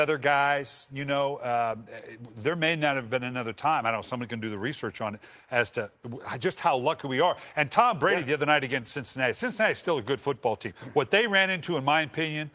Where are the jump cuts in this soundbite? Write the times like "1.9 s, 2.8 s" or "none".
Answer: none